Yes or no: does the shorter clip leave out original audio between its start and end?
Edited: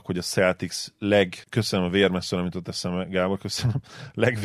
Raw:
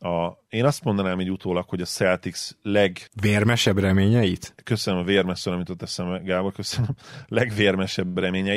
yes